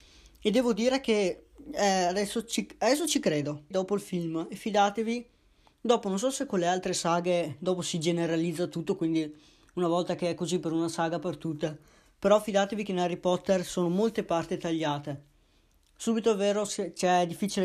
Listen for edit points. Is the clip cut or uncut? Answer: cut